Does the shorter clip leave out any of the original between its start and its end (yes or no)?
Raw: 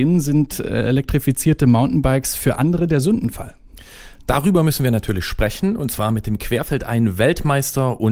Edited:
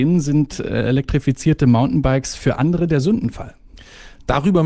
no